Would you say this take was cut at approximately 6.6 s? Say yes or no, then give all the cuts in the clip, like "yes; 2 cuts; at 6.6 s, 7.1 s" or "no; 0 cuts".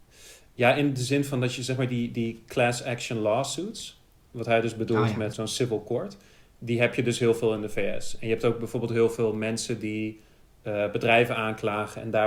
no; 1 cut; at 5.3 s